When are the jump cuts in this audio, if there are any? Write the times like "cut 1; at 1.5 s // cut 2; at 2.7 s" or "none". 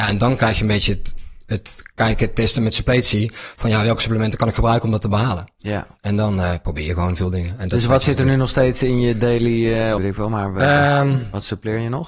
cut 1; at 10.0 s